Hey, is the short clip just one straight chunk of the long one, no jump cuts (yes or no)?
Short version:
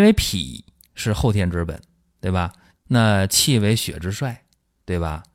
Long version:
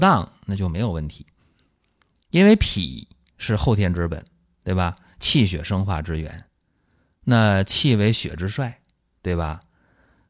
no